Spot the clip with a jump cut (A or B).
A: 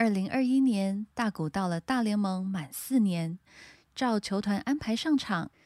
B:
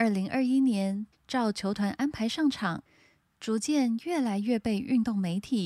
B